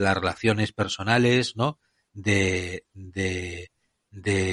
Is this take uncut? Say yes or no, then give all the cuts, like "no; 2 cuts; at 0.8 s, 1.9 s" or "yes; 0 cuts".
yes; 0 cuts